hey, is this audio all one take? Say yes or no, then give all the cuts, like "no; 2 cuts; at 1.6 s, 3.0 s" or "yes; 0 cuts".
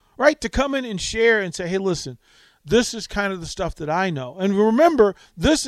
yes; 0 cuts